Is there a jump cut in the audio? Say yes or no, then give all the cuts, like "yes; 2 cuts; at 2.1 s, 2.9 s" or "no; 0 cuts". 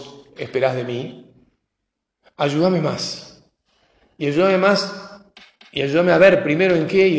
no; 0 cuts